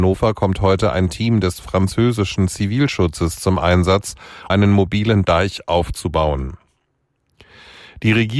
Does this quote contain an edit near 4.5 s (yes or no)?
yes